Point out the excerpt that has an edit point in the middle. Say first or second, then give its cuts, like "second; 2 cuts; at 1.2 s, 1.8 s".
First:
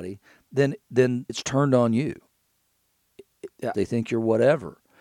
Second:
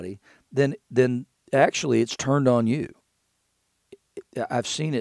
first; 2 cuts; at 1.3 s, 3.7 s